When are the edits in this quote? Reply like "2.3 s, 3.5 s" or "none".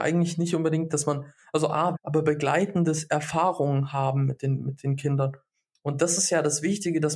1.9 s